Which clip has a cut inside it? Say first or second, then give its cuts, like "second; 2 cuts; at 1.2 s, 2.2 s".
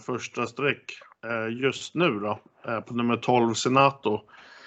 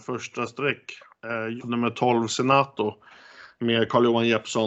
second; 1 cut; at 1.6 s